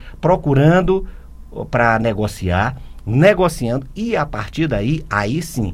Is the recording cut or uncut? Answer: uncut